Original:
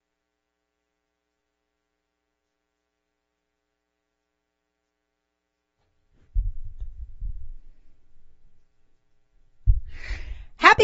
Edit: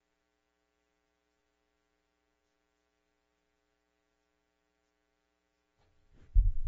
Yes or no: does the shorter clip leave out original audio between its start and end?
no